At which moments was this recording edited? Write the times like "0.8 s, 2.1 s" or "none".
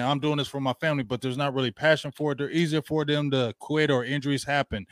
none

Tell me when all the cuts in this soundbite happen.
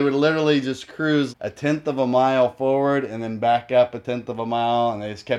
1.3 s

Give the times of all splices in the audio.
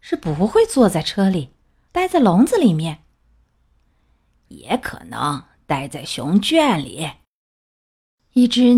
1.9 s

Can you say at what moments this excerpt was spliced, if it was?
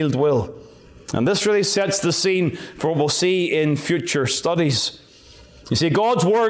none

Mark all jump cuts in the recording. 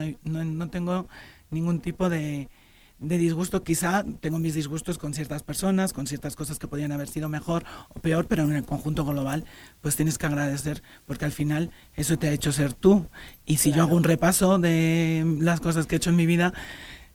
none

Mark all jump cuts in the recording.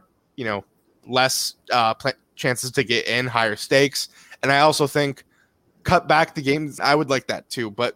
6.8 s

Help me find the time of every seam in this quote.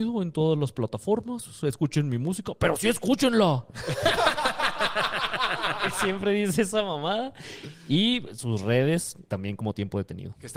9.2 s

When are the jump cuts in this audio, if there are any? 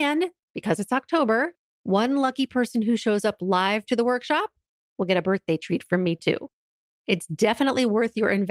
none

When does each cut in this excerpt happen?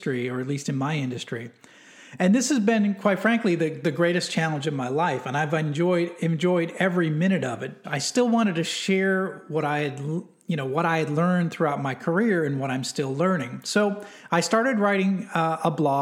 7.8 s

